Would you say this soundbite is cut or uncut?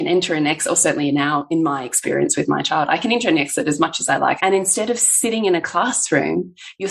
cut